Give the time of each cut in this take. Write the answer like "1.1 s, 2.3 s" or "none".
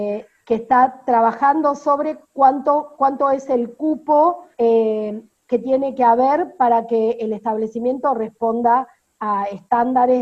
4.5 s